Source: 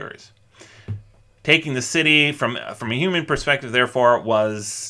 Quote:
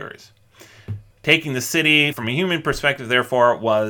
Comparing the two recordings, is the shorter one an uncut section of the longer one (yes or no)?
no